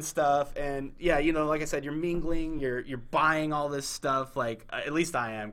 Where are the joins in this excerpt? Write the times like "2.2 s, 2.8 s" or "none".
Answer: none